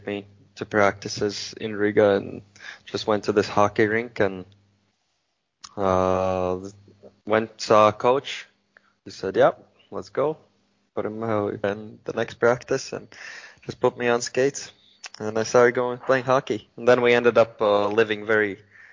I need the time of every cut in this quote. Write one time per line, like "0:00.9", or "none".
0:11.6